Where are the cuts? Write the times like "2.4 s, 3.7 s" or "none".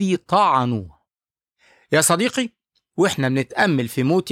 none